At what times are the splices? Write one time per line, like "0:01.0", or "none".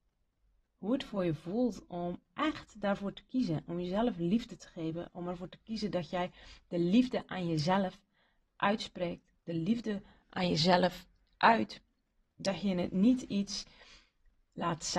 none